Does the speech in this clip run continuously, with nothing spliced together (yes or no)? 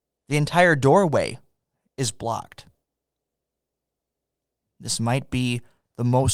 yes